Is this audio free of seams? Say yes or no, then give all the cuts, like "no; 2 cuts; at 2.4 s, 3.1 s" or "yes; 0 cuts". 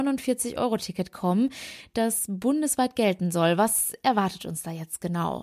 yes; 0 cuts